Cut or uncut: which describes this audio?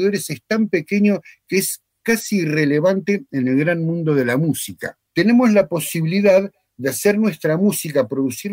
cut